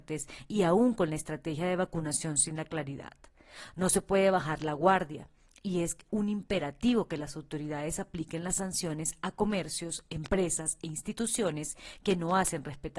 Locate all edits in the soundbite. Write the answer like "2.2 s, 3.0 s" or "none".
none